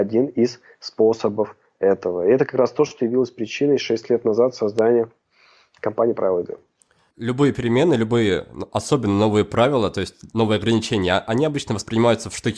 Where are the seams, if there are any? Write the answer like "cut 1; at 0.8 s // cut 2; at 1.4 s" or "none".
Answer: none